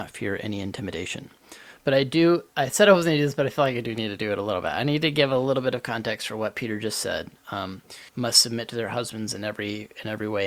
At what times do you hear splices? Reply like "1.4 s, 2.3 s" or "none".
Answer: 1.8 s, 8.1 s